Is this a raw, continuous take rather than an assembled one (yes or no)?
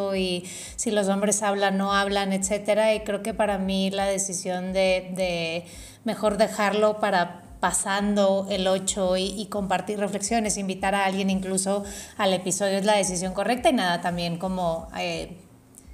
yes